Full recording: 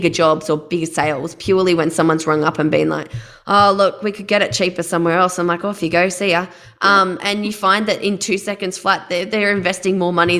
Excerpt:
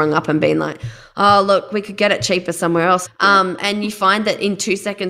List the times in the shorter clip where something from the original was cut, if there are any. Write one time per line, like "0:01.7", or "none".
0:03.1